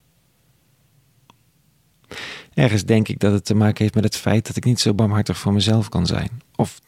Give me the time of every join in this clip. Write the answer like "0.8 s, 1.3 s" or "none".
none